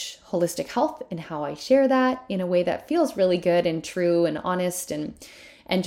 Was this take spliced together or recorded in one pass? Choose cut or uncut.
uncut